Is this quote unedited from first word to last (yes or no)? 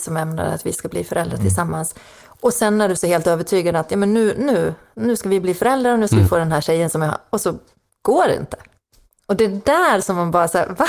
yes